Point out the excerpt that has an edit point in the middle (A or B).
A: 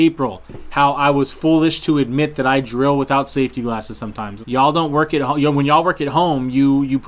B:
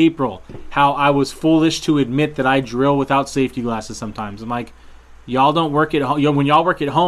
A